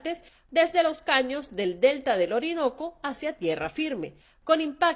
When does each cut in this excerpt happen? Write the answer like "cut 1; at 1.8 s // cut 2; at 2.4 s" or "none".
none